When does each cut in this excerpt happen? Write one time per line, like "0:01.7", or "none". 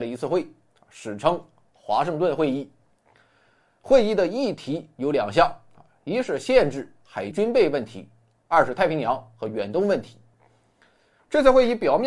0:07.3